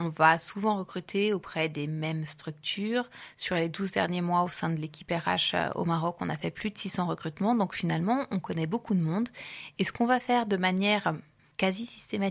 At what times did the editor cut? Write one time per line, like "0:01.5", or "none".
none